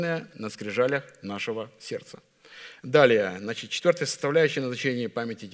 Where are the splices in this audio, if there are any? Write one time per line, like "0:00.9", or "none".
0:02.8